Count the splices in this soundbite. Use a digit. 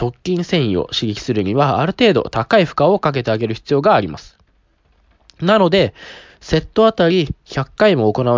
0